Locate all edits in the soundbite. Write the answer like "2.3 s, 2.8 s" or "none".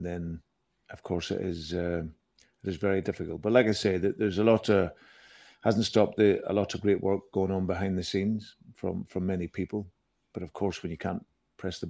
none